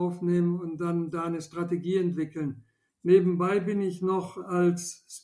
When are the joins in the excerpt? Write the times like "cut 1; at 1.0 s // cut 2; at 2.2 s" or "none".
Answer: cut 1; at 2.9 s